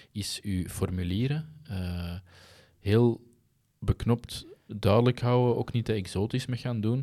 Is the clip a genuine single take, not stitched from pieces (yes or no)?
no